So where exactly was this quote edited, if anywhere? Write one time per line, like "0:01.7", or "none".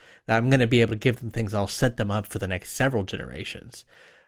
none